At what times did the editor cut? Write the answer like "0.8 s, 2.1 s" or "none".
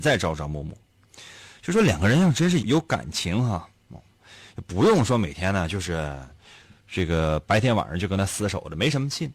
2.6 s